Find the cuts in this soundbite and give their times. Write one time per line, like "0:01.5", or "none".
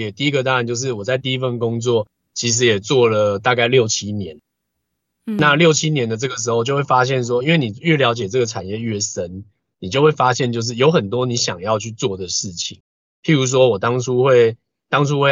none